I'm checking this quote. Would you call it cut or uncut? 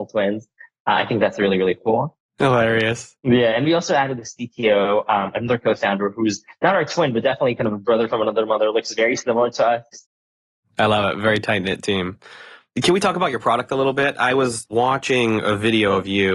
uncut